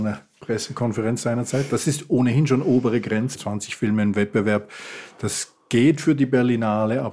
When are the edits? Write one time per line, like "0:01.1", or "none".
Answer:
0:03.4